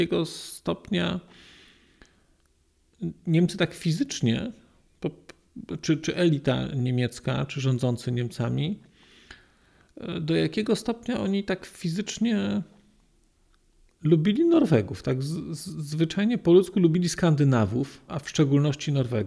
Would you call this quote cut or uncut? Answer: cut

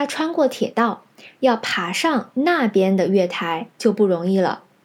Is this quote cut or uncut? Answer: uncut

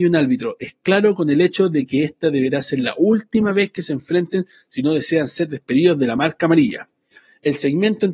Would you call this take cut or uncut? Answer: uncut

